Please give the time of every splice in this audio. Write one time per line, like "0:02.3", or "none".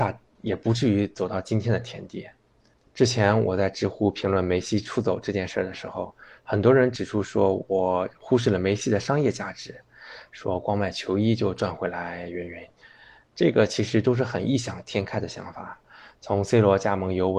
0:02.9